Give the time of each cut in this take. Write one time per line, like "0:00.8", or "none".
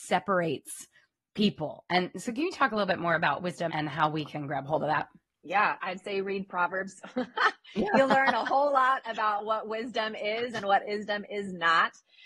0:03.7
0:05.8